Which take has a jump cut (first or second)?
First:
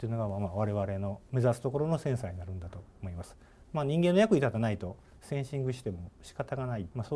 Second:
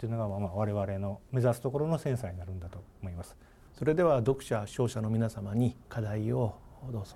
second